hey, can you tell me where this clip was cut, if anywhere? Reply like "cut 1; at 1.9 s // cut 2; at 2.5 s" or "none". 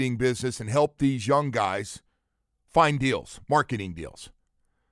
none

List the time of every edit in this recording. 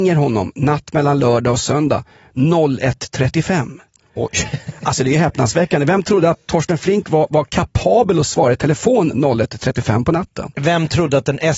none

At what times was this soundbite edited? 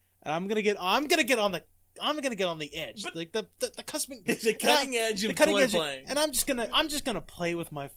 cut 1; at 4.3 s // cut 2; at 6.7 s

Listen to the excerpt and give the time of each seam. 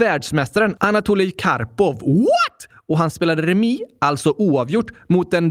none

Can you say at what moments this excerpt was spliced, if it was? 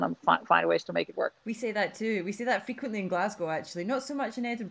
cut 1; at 1.4 s

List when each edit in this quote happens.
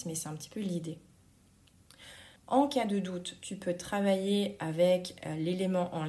cut 1; at 2.4 s

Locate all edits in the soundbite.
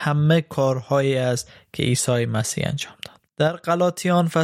cut 1; at 3.3 s

